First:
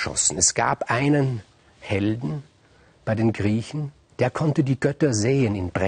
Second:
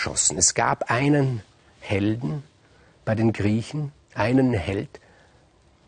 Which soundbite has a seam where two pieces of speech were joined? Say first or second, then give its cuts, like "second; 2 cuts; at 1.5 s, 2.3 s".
first; 1 cut; at 4.1 s